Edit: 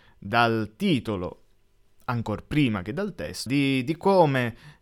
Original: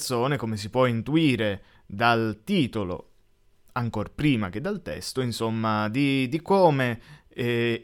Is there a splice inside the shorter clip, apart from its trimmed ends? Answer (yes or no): yes